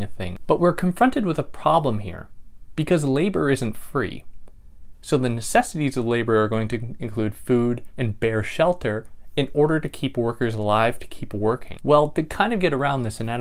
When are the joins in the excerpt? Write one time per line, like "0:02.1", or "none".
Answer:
0:04.9
0:07.9
0:11.8